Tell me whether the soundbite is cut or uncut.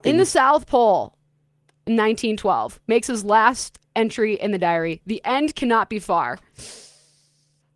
uncut